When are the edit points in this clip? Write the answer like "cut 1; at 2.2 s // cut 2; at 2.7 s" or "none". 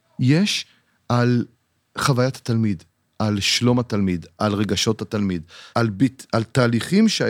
cut 1; at 5.7 s